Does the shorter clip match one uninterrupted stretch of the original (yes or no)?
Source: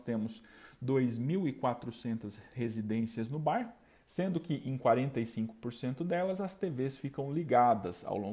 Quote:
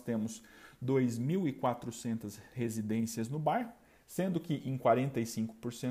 yes